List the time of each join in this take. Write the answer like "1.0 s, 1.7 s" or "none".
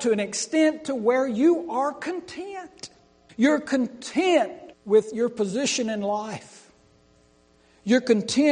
3.3 s, 4.7 s